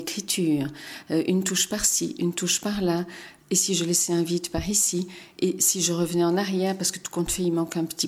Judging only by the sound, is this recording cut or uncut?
uncut